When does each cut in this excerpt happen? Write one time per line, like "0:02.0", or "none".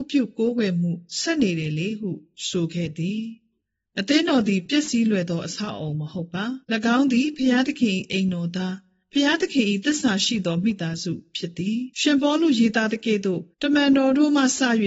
0:06.6
0:11.9
0:13.5